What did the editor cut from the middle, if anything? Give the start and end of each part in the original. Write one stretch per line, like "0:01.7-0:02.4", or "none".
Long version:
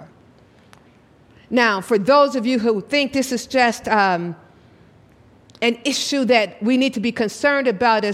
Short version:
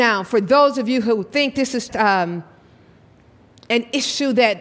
0:03.5-0:03.8